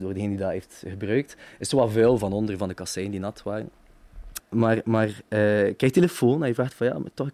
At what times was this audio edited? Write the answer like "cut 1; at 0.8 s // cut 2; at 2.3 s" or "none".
cut 1; at 4.4 s